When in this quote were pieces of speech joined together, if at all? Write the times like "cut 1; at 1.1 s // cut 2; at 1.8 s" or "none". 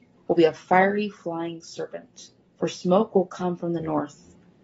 cut 1; at 2.4 s